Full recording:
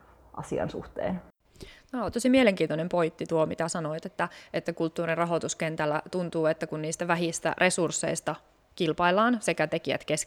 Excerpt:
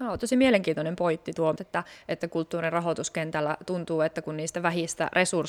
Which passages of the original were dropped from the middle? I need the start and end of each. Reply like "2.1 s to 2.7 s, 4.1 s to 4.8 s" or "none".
3.5 s to 4.0 s